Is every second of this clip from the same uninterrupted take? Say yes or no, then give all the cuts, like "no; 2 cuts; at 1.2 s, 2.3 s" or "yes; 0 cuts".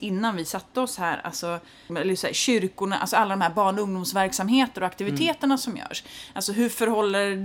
no; 1 cut; at 1.9 s